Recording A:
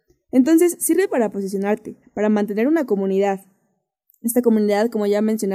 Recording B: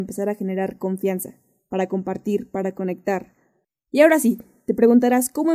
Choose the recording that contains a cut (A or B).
A